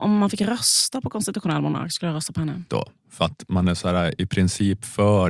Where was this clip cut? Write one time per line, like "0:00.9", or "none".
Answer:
0:02.7